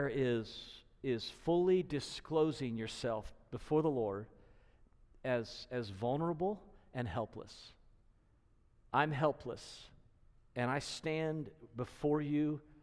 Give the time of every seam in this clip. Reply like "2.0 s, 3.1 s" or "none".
8.8 s